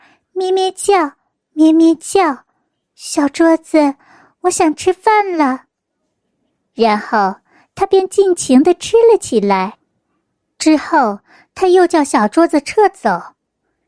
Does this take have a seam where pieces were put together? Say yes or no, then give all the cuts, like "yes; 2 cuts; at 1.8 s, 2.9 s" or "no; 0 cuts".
no; 0 cuts